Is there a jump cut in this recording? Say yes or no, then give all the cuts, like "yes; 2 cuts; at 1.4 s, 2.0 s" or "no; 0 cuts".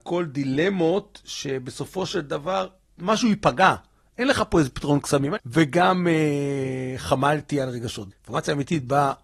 yes; 2 cuts; at 5.4 s, 8.1 s